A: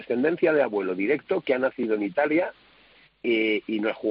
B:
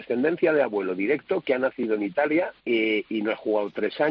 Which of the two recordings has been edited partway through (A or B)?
B